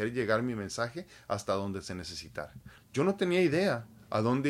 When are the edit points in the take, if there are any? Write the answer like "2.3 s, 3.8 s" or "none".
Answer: 2.8 s

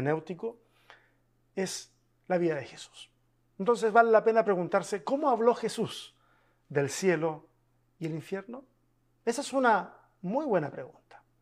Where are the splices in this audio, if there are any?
none

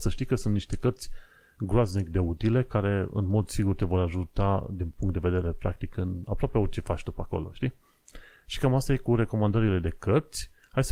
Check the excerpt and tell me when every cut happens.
none

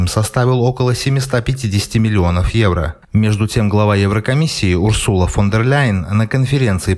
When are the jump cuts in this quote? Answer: none

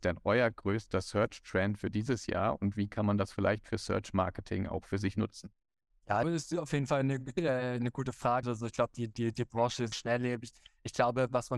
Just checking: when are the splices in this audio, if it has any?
6.2 s, 8.4 s, 9.9 s

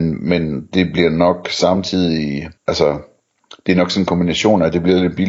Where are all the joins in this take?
2.6 s

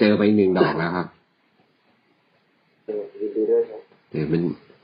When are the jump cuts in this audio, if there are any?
2.9 s

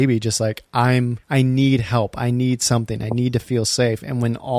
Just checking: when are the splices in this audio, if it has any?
1.2 s

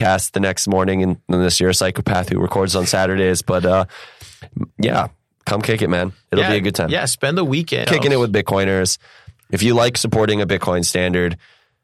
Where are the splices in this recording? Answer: 7.8 s

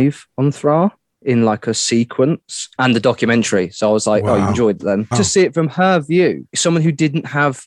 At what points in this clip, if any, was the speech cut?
2.8 s, 5.1 s, 6.5 s

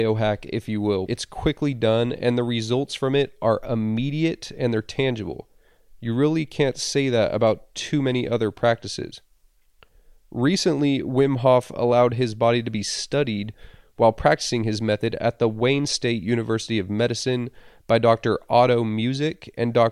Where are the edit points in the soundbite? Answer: 1.1 s

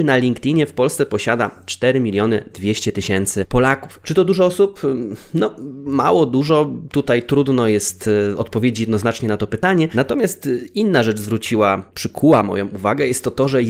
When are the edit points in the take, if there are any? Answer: 4.0 s

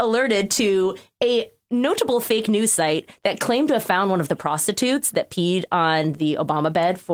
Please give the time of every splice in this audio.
none

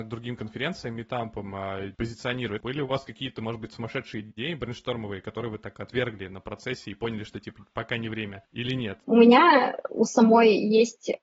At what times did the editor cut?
2.6 s, 9.0 s

